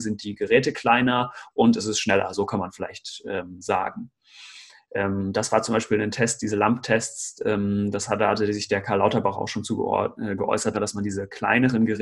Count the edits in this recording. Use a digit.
1